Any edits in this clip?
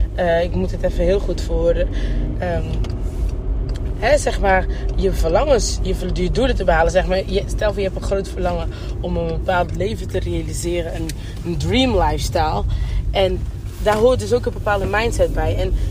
yes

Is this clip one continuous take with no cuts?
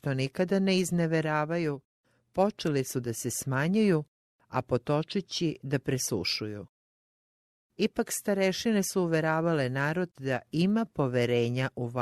yes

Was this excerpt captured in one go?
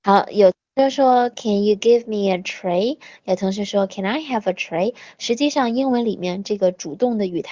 yes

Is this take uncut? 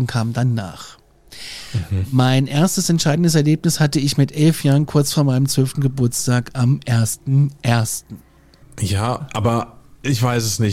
no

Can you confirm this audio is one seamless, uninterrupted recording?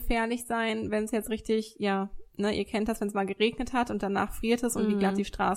yes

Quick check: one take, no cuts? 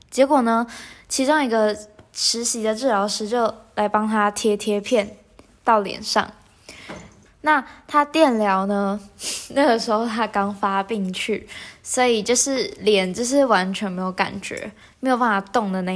no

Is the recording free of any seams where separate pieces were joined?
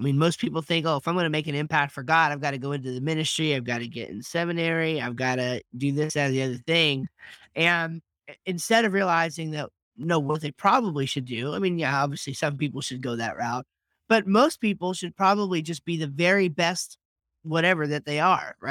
yes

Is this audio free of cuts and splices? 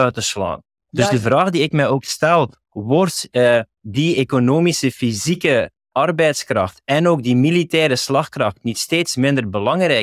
yes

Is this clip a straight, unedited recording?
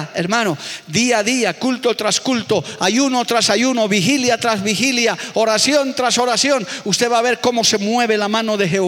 yes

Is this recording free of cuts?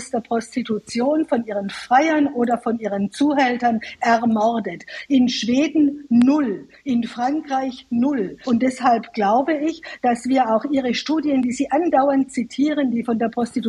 no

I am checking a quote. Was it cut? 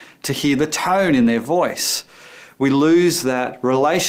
no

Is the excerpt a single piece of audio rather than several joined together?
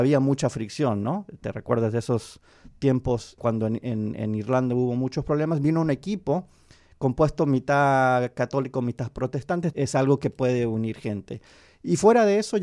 no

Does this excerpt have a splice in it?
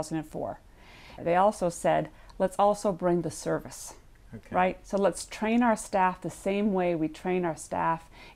yes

